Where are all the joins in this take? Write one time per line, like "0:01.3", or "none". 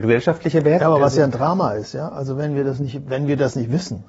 none